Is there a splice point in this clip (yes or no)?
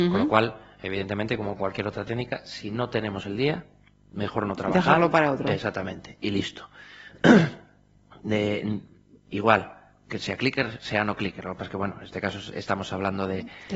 no